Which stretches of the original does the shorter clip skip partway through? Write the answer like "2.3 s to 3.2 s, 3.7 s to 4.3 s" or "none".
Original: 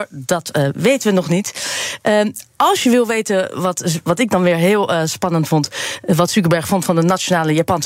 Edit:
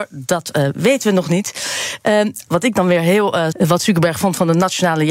2.5 s to 4.0 s, 5.1 s to 6.0 s